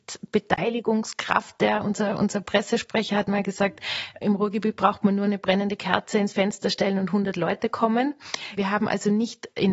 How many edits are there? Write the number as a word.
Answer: two